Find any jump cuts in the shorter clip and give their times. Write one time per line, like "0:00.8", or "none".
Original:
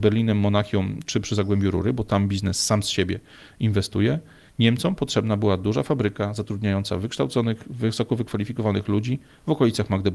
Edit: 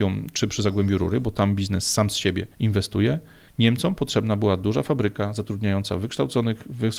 0:02.5